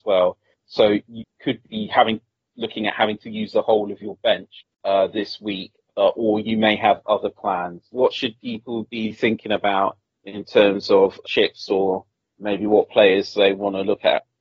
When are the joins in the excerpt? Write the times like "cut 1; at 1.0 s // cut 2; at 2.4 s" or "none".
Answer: cut 1; at 7.9 s // cut 2; at 11.2 s